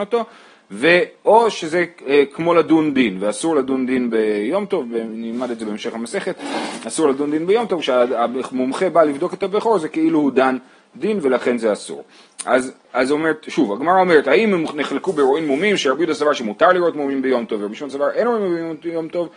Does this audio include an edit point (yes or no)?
yes